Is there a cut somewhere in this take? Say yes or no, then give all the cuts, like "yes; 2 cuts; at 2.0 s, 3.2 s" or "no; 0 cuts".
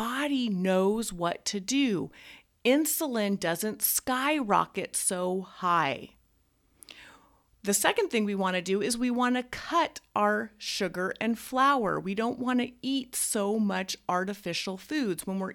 no; 0 cuts